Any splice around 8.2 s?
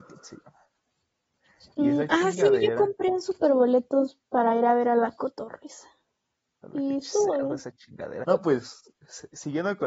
yes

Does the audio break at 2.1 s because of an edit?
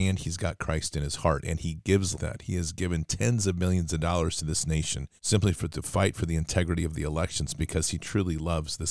yes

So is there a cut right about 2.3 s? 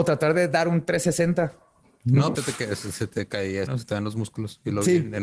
yes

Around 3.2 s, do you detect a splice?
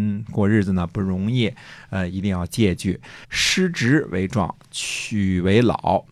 yes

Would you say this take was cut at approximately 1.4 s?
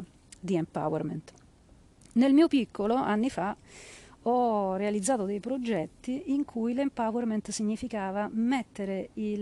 no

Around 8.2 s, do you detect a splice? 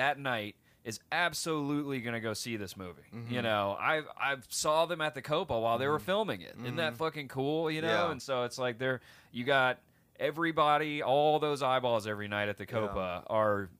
no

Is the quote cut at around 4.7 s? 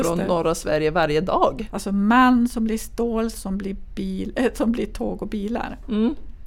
no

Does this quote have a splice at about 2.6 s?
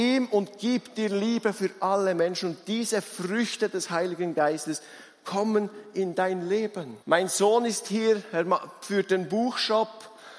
no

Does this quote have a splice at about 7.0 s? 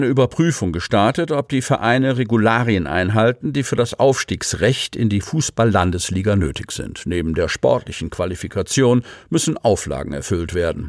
no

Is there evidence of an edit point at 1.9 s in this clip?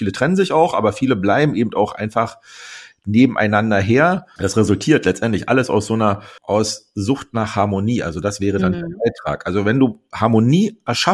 no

